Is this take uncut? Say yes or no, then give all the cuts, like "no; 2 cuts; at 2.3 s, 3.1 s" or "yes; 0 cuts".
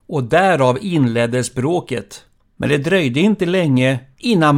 no; 1 cut; at 2.4 s